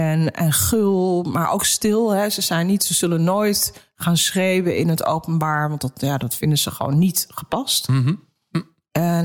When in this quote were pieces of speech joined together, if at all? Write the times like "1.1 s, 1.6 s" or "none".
none